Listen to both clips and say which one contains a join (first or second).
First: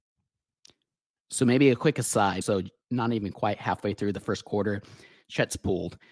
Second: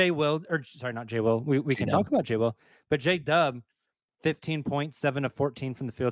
first